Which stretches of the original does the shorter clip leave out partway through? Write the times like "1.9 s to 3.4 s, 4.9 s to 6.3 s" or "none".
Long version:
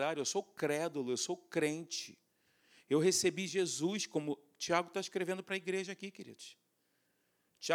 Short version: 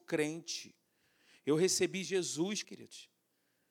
4.1 s to 6.1 s